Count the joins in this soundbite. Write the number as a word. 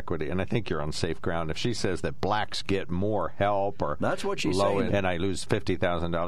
one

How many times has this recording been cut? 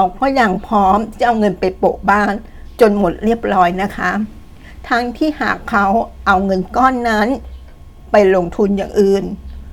zero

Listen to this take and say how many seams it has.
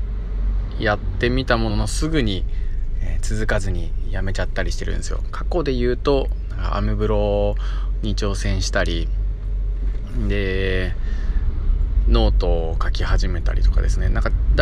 one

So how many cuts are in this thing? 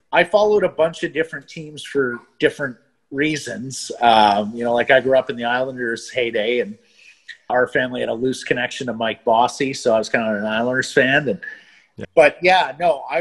two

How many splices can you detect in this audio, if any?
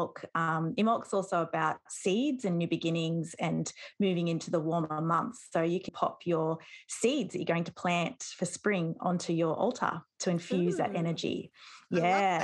one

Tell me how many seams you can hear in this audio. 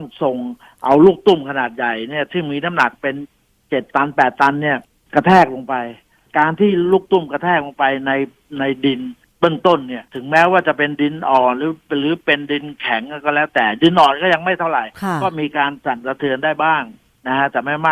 one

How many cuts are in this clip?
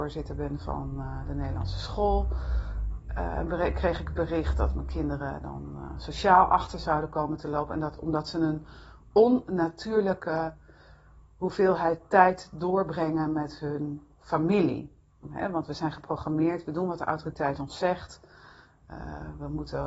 one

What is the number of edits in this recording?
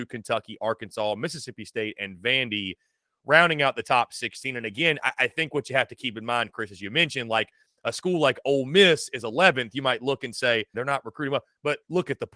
one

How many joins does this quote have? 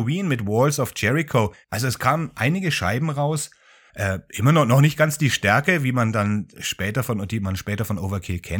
two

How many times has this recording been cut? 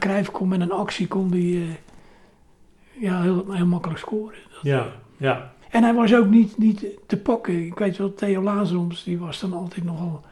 one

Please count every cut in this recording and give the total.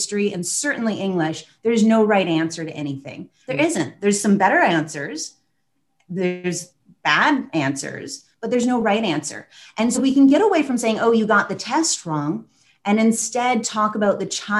two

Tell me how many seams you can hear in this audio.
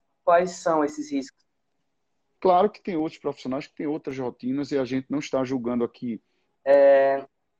two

